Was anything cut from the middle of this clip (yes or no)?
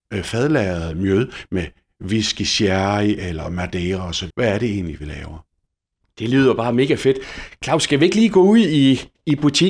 yes